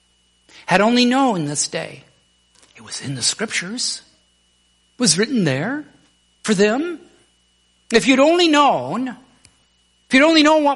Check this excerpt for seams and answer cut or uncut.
uncut